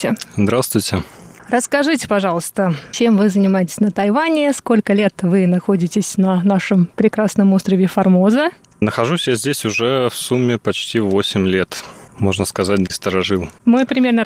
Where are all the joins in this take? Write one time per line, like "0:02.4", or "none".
none